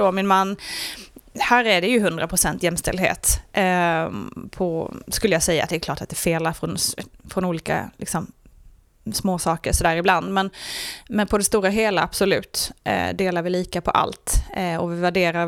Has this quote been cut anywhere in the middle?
no; 0 cuts

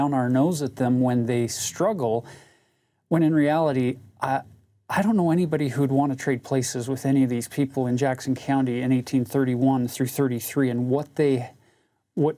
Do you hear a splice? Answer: no; 0 cuts

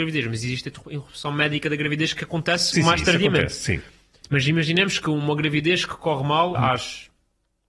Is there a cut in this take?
yes; 2 cuts; at 4.2 s, 6.6 s

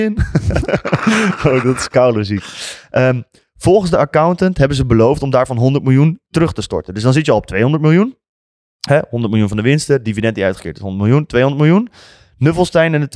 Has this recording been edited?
no; 0 cuts

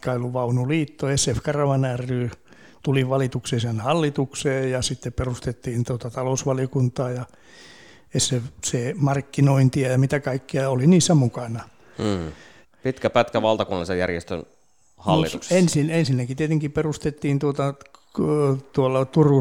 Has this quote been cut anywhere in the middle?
yes; 1 cut; at 12.6 s

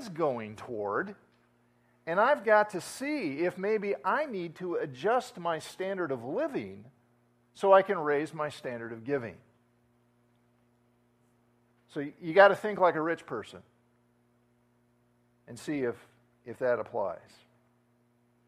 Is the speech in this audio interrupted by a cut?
no; 0 cuts

